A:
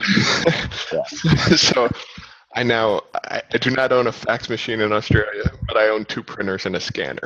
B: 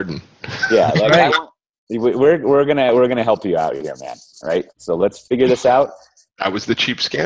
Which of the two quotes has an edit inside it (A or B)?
B